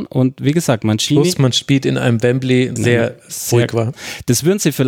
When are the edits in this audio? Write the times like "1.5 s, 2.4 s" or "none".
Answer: 2.8 s, 3.9 s